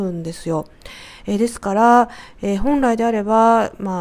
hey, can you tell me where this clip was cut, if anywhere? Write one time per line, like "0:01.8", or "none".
none